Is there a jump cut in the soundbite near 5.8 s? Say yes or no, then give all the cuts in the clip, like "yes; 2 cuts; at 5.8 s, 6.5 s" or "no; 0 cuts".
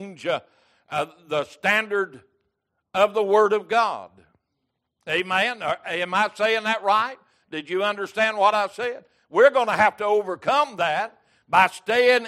no; 1 cut; at 9.2 s